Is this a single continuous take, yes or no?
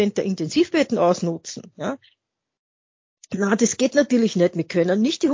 yes